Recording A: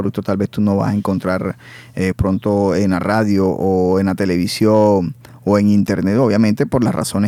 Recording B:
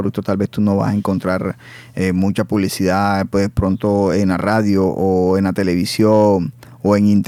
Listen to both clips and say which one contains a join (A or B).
A